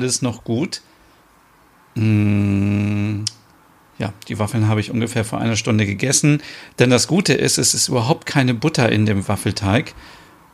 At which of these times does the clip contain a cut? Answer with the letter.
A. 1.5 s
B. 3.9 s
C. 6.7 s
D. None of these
D